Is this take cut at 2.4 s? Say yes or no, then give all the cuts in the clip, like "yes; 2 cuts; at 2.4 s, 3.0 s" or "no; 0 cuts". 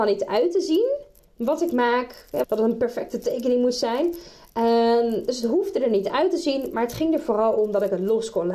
yes; 1 cut; at 2.4 s